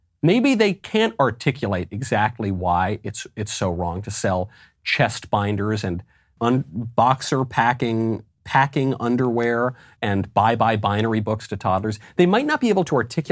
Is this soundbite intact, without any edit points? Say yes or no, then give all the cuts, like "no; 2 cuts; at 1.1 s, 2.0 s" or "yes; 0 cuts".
no; 2 cuts; at 6.4 s, 10.0 s